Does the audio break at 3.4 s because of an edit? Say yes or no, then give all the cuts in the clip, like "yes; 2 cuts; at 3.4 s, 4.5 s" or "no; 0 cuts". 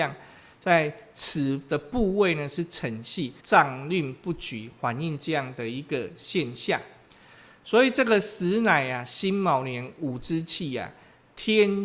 yes; 1 cut; at 3.4 s